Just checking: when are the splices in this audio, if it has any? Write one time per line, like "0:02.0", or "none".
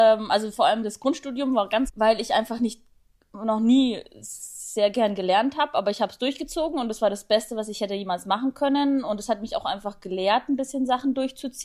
0:01.9